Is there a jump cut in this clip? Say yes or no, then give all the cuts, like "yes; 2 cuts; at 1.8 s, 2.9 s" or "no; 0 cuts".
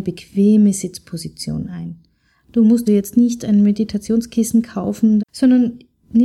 yes; 2 cuts; at 2.9 s, 5.2 s